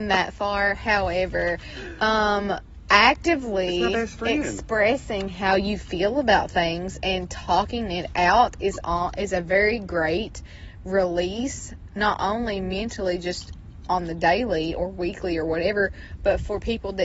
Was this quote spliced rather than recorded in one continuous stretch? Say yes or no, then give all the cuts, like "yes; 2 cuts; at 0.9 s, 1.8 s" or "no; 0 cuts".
no; 0 cuts